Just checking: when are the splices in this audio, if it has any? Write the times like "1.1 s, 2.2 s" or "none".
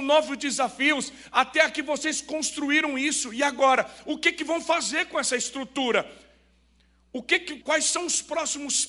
7.6 s